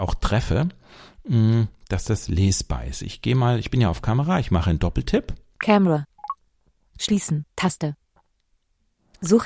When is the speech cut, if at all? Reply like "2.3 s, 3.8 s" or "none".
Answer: none